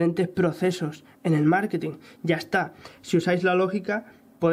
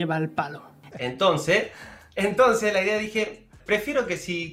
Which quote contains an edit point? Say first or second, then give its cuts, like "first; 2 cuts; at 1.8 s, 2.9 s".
second; 2 cuts; at 0.9 s, 3.6 s